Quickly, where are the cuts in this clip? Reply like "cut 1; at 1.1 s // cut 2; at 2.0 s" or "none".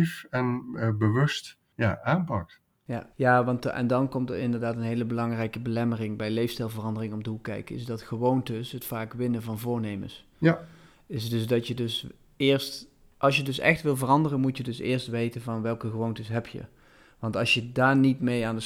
none